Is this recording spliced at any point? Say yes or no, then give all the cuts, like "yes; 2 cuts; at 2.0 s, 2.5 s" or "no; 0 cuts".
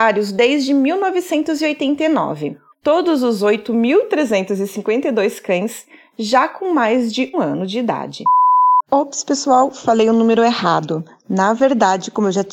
yes; 2 cuts; at 2.7 s, 7.3 s